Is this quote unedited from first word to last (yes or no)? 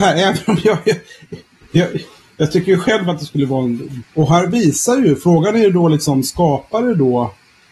no